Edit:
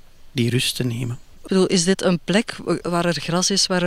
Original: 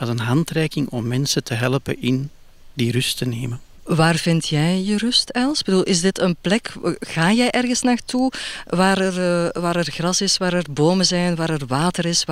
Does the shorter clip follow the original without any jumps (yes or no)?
no